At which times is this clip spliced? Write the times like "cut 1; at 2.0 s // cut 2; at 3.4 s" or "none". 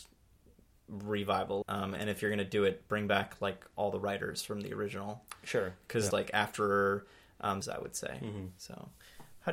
cut 1; at 1.6 s // cut 2; at 6.1 s // cut 3; at 7.6 s